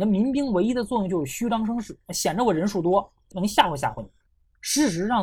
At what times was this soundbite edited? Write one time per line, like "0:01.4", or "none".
none